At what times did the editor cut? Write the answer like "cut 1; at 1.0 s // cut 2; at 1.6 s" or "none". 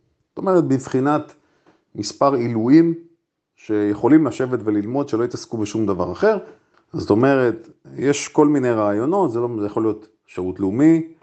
cut 1; at 6.7 s

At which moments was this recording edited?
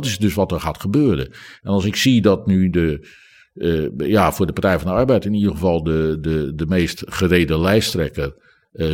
none

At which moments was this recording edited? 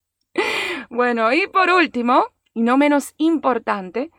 none

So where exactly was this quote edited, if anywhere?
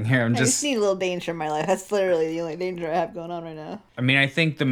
none

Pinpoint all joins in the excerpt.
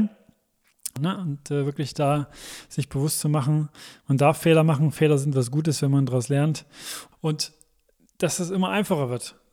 cut 1; at 7.1 s

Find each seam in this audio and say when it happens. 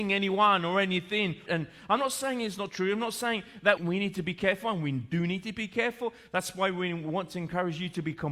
cut 1; at 1.5 s // cut 2; at 3.8 s

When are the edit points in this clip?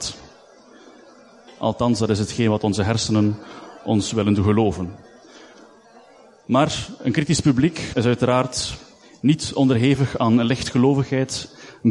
cut 1; at 1.5 s // cut 2; at 7.9 s

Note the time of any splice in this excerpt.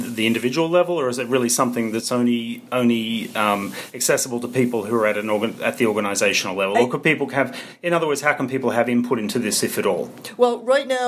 none

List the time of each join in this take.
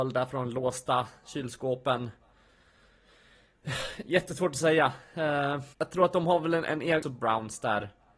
cut 1; at 5.7 s // cut 2; at 7.0 s

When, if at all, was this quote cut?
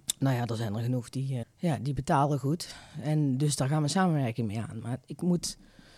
cut 1; at 1.4 s

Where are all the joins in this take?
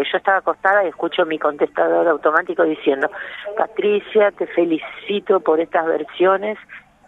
none

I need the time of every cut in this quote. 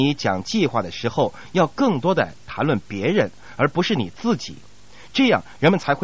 none

